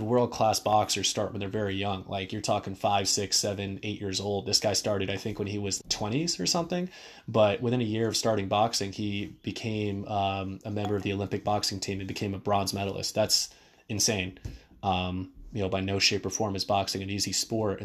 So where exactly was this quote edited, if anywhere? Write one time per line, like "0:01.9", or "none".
0:05.8